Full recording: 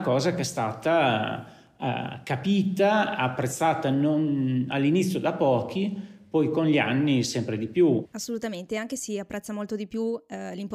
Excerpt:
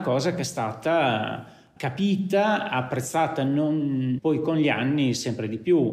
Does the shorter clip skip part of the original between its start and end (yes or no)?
yes